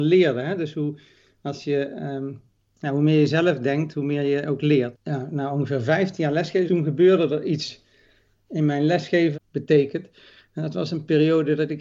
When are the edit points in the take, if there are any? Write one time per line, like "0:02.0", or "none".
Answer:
0:04.9
0:06.7
0:09.3

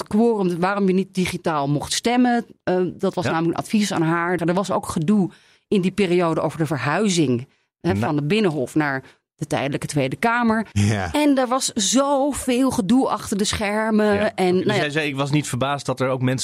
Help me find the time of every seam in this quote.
0:04.4
0:10.7

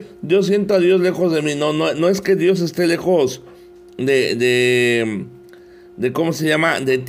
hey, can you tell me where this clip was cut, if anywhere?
none

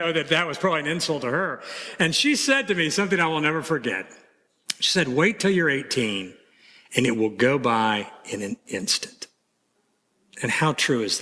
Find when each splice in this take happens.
none

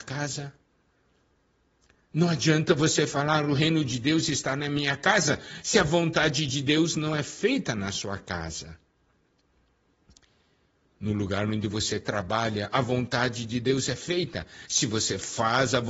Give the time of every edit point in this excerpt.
none

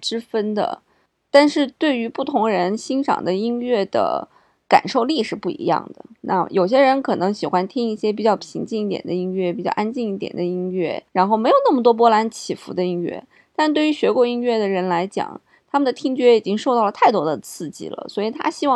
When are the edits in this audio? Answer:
0:11.1

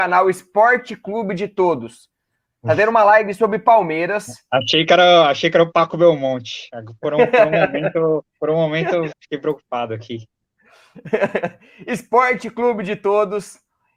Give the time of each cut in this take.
0:09.1

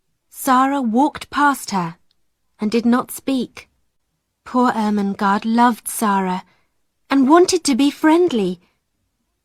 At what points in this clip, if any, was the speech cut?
none

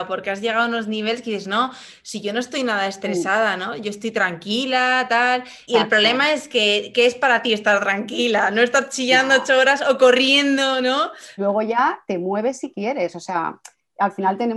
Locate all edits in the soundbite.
0:05.7
0:11.4

